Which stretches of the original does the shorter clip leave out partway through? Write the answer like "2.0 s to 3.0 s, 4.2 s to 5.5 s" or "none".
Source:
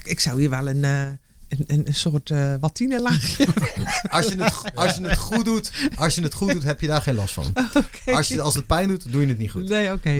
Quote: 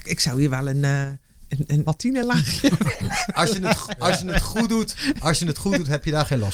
1.8 s to 2.6 s